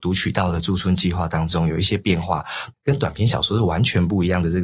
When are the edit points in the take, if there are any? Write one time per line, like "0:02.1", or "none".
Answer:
0:02.7